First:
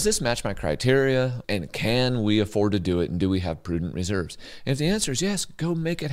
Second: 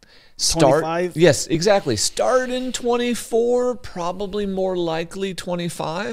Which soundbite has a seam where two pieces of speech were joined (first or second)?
first